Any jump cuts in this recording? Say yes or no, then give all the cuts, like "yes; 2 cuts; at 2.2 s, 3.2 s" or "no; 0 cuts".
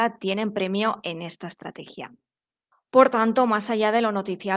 no; 0 cuts